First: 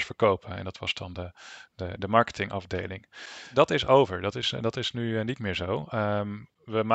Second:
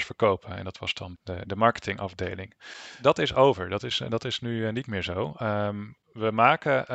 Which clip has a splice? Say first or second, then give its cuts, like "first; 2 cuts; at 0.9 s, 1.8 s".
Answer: second; 1 cut; at 1.1 s